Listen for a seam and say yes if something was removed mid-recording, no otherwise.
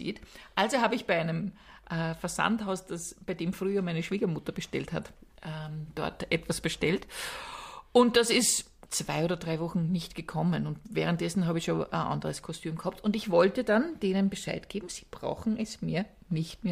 yes